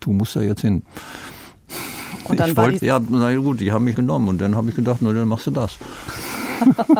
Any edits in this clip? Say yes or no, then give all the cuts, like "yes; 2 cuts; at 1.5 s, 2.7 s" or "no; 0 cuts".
yes; 2 cuts; at 2.8 s, 3.9 s